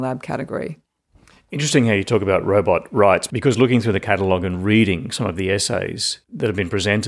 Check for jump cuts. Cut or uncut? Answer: uncut